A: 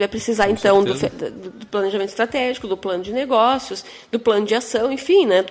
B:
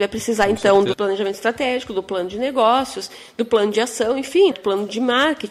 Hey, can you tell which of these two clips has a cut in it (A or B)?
B